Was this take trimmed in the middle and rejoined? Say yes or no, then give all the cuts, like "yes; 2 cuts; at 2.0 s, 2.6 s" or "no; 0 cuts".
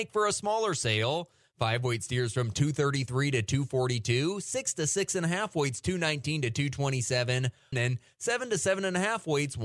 yes; 1 cut; at 7.7 s